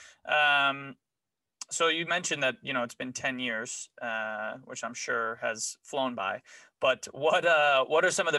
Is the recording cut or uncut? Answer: uncut